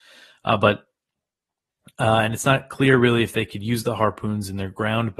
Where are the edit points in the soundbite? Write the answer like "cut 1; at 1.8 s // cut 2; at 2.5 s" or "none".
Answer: none